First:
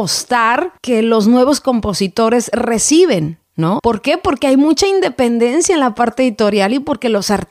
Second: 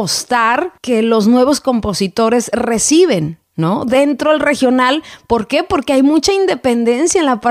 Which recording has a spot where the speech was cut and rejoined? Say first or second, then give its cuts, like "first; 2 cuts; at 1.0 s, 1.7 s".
first; 1 cut; at 3.8 s